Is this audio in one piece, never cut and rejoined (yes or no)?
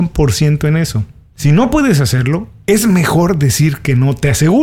yes